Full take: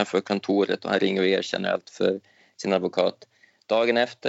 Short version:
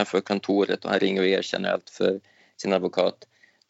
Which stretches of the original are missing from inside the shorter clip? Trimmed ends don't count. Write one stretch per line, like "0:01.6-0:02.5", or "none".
none